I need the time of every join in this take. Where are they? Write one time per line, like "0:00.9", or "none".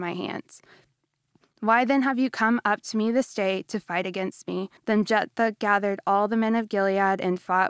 0:04.8